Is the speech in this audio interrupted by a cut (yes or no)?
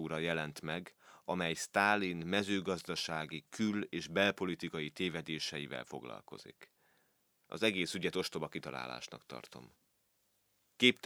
no